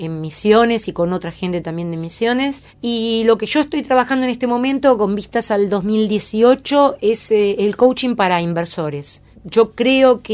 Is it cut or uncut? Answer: uncut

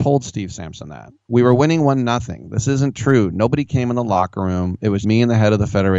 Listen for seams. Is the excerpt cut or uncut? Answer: cut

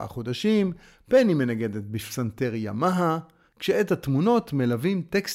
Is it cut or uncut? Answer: cut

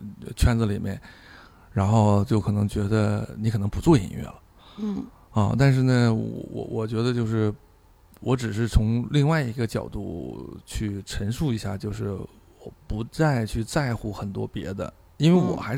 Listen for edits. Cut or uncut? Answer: uncut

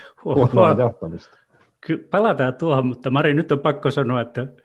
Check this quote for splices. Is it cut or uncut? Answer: uncut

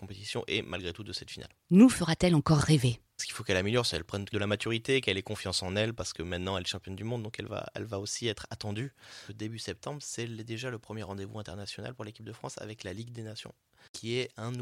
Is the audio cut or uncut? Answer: cut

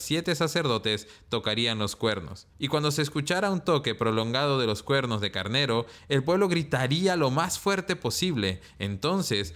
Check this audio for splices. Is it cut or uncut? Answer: cut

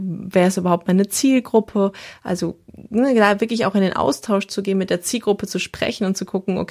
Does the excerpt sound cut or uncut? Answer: uncut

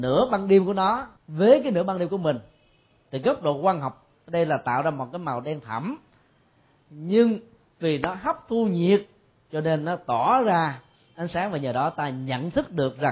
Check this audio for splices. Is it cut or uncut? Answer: cut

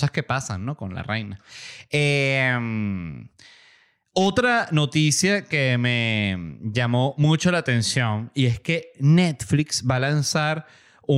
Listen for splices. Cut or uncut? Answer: uncut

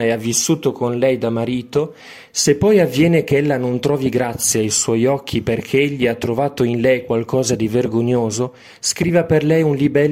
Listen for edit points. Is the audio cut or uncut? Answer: uncut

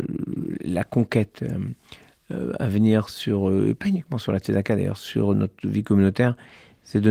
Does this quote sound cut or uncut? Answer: uncut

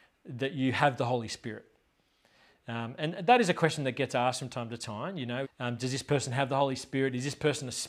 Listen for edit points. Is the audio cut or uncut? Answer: cut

